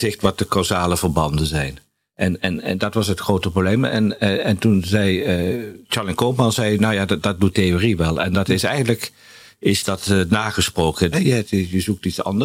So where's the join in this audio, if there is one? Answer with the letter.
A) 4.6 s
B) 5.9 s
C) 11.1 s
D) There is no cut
C